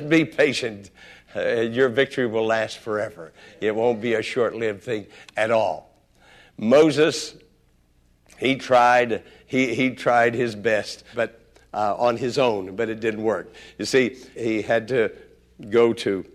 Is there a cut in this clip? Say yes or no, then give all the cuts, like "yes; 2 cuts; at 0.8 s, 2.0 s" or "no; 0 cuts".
yes; 2 cuts; at 11.1 s, 14.3 s